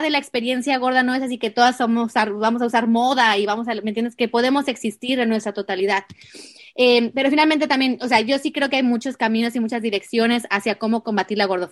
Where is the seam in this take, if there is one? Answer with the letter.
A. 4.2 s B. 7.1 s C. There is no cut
C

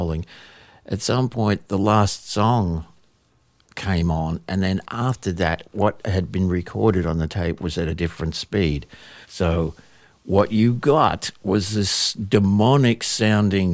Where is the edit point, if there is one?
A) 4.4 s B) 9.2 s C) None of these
B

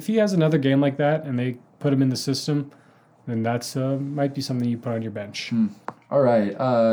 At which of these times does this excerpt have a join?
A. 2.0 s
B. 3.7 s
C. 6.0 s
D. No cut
D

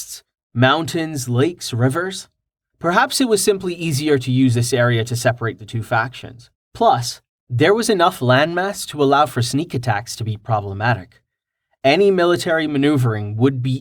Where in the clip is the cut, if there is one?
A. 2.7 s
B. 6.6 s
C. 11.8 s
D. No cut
A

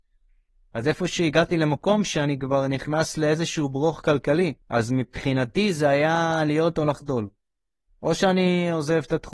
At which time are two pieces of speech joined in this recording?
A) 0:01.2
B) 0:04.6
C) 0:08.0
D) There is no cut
B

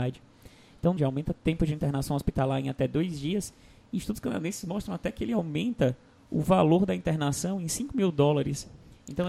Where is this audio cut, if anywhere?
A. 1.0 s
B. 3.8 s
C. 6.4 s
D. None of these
A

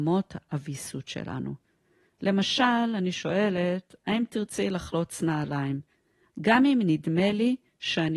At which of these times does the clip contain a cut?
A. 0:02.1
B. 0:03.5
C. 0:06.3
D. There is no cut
C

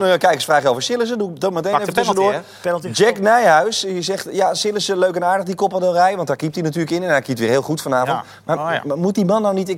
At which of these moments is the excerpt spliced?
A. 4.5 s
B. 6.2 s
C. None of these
C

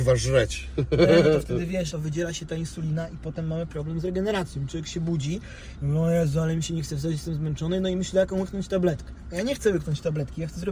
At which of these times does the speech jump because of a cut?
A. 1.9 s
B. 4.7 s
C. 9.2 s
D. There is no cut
A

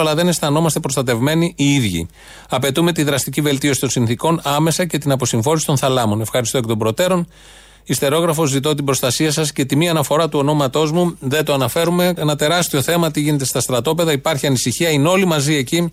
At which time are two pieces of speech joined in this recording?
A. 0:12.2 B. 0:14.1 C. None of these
A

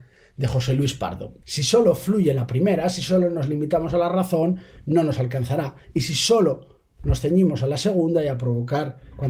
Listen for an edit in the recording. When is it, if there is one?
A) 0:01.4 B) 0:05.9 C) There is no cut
A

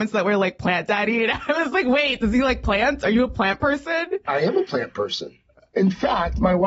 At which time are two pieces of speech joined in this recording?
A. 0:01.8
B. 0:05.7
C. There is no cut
B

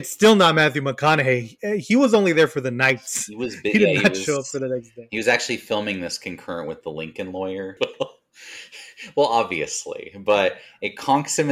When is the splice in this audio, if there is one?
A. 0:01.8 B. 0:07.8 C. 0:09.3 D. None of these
B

